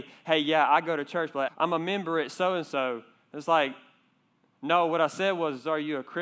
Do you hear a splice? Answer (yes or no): yes